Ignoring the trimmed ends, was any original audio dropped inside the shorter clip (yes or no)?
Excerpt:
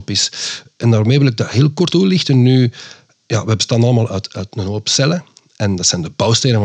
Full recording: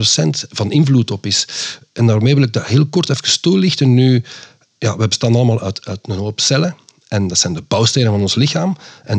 yes